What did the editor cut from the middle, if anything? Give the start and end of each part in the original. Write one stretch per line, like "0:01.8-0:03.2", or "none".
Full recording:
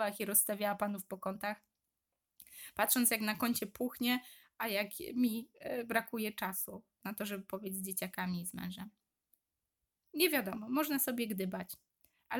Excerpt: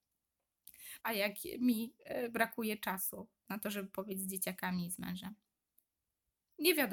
0:02.7-0:04.5